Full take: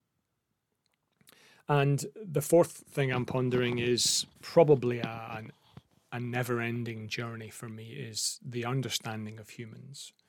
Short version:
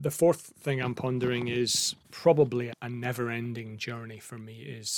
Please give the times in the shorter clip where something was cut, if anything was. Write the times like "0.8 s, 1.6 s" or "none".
2.7 s